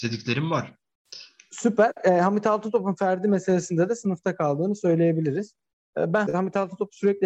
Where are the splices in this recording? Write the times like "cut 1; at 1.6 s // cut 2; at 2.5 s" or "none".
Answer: cut 1; at 6.3 s